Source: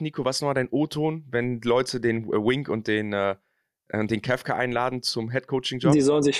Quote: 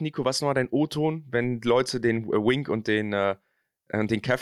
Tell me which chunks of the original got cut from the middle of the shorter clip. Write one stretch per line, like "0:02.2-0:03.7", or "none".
none